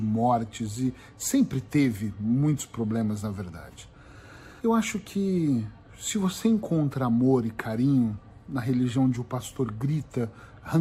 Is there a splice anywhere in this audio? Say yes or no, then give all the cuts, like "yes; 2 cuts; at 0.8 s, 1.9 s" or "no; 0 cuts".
yes; 1 cut; at 4.6 s